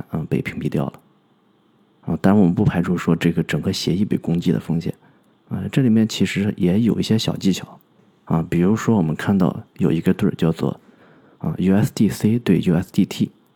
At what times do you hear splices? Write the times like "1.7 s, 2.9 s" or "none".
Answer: 5.3 s